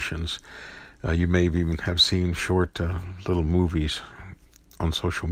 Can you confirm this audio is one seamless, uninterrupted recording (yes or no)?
yes